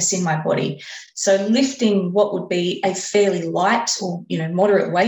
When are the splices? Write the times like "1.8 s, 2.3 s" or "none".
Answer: none